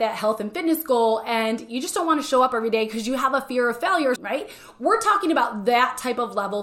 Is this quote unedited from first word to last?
no; 1 cut; at 4.2 s

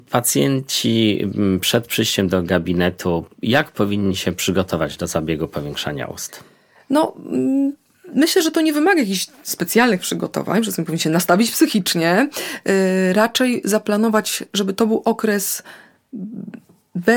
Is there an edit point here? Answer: no; 0 cuts

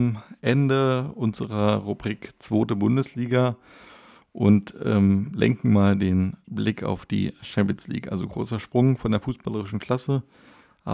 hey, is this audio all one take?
yes; 0 cuts

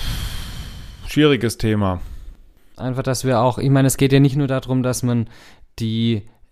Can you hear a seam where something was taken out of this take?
yes; 1 cut; at 2.7 s

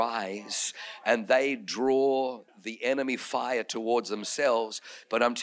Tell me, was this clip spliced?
yes; 1 cut; at 2.5 s

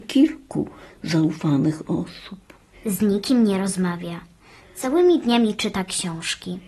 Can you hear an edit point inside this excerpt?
yes; 1 cut; at 2.7 s

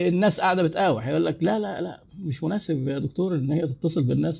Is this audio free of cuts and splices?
yes; 0 cuts

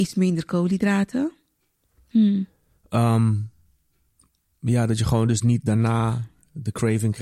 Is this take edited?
yes; 1 cut; at 2.1 s

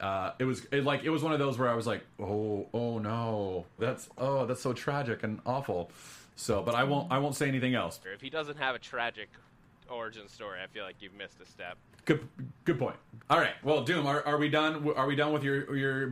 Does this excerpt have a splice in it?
yes; 3 cuts; at 3.8 s, 8.0 s, 13.2 s

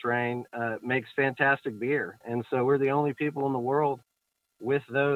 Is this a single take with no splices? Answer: yes; 0 cuts

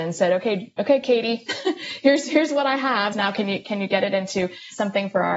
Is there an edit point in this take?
yes; 1 cut; at 3.1 s

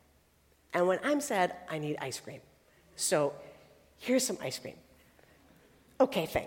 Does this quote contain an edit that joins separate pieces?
no; 0 cuts

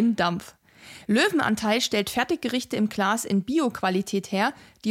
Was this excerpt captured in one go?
no; 1 cut; at 1.0 s

